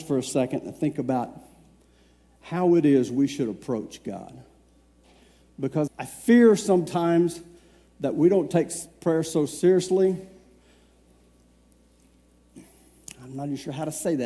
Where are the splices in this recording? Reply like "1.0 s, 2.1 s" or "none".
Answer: 5.9 s